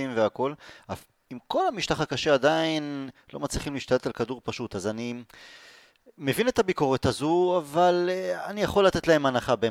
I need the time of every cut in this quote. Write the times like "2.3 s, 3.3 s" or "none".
none